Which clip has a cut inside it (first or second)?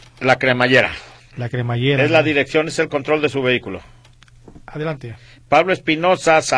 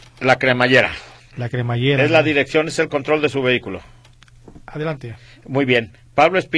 first